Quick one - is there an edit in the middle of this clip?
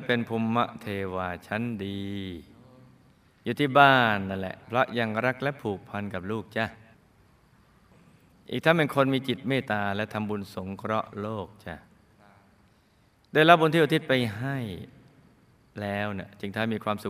yes; 2 cuts; at 4.6 s, 9.6 s

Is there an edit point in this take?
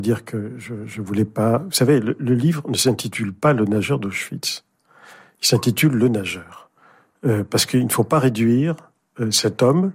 no; 0 cuts

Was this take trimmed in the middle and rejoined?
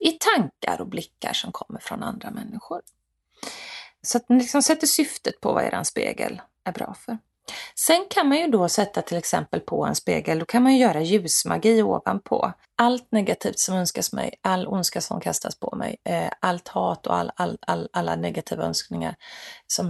yes; 1 cut; at 12.6 s

